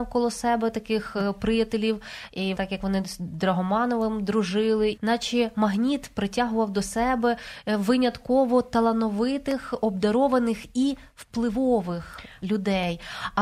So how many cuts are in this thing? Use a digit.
2